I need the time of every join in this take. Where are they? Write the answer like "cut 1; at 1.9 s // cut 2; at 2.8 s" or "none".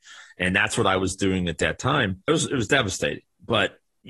cut 1; at 2.3 s